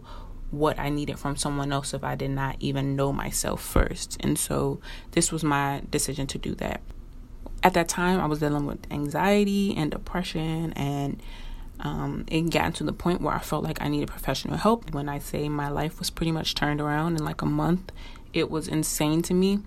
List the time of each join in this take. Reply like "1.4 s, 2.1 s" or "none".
14.9 s